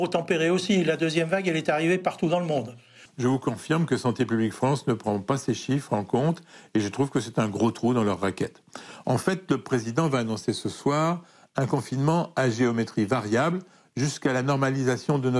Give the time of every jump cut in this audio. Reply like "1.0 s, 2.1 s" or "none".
3.1 s

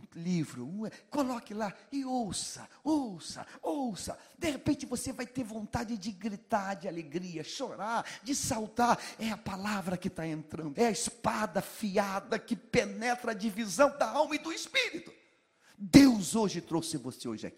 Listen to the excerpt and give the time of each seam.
10.7 s

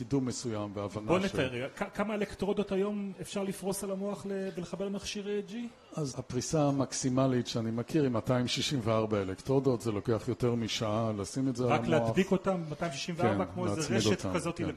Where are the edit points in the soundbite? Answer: 6.1 s

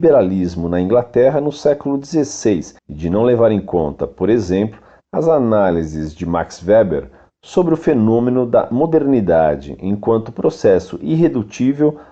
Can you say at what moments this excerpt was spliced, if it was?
2.8 s

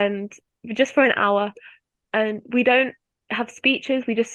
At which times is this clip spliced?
none

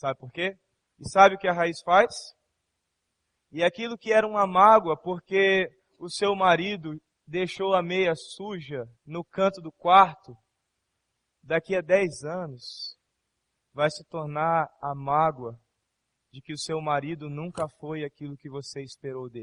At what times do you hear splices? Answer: 0.9 s, 3.4 s, 9.0 s

